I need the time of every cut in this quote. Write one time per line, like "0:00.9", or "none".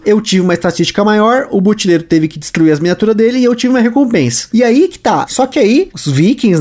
0:05.3